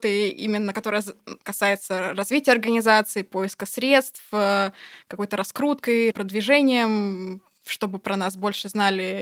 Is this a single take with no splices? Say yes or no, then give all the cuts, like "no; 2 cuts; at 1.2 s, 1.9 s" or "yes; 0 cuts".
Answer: yes; 0 cuts